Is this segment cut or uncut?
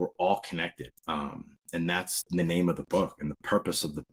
cut